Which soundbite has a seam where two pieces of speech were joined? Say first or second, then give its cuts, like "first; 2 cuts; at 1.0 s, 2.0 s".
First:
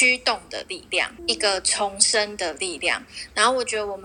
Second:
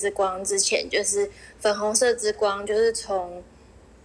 first; 1 cut; at 1.2 s